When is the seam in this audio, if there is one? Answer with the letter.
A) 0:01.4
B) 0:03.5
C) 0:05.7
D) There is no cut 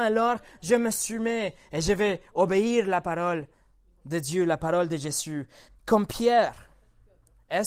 C